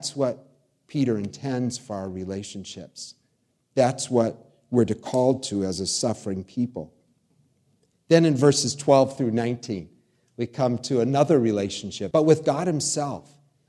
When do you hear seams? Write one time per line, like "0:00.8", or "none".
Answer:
0:12.1